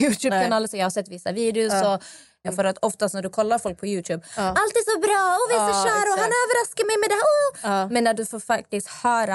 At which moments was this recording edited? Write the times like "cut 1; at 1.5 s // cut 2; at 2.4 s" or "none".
cut 1; at 2.4 s